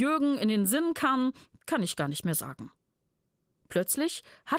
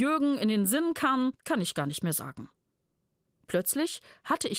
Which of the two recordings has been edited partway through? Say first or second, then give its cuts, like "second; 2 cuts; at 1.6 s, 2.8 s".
second; 1 cut; at 1.3 s